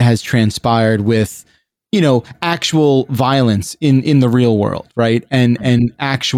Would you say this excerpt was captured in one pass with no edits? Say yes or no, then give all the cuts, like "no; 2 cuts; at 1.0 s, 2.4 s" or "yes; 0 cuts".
yes; 0 cuts